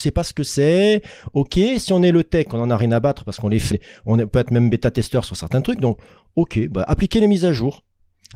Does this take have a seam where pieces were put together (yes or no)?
yes